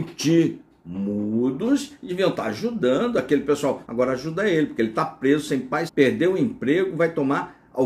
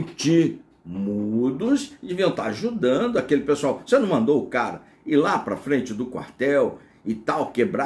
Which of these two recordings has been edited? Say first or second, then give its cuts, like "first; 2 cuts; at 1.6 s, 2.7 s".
first; 2 cuts; at 3.8 s, 5.9 s